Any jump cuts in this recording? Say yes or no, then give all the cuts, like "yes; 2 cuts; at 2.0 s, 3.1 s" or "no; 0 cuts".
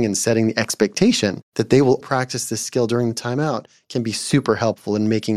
yes; 1 cut; at 2.0 s